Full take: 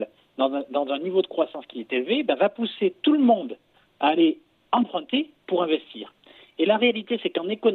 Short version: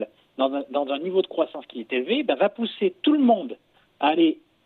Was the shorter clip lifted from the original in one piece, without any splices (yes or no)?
yes